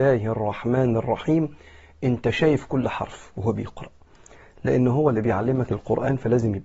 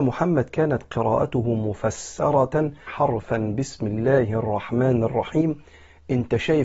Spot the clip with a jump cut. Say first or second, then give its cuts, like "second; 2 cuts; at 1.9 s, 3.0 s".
second; 1 cut; at 2.9 s